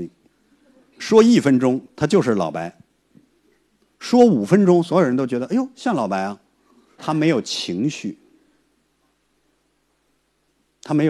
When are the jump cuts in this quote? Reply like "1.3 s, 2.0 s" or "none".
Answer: 7.0 s